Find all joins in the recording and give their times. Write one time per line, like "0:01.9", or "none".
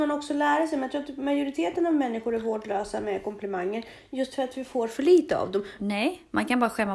0:05.8